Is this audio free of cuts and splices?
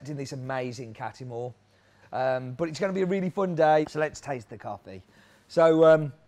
no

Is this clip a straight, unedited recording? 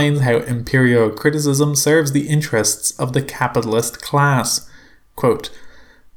yes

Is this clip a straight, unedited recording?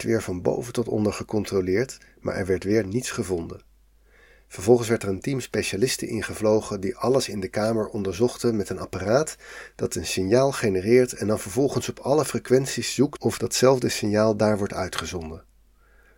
yes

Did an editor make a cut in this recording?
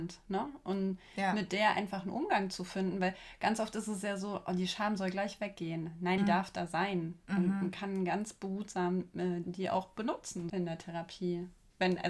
yes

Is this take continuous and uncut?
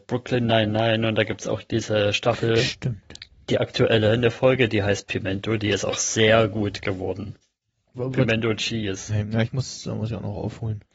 no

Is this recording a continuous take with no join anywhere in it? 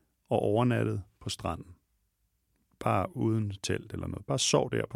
yes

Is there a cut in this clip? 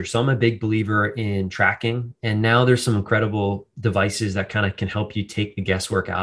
no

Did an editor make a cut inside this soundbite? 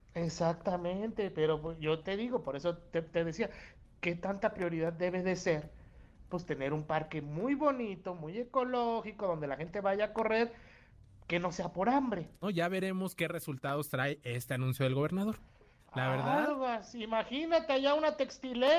yes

